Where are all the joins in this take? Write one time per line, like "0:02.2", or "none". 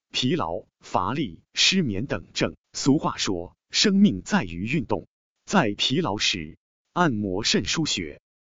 0:02.6